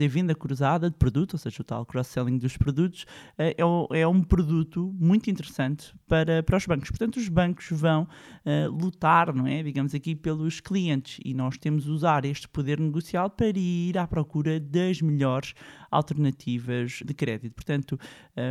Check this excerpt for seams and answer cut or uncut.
cut